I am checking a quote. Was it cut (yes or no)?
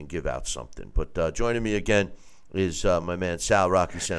no